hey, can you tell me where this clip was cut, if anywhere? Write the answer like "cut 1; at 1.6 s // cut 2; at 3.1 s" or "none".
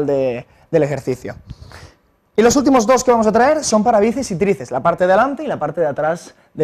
none